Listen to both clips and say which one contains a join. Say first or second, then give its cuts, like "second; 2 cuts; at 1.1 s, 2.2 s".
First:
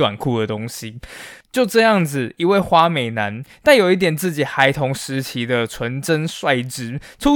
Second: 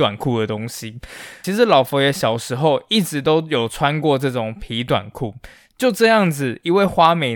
first; 1 cut; at 1.4 s